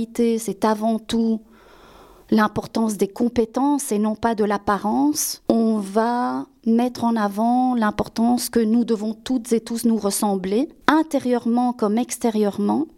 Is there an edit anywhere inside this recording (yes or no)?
no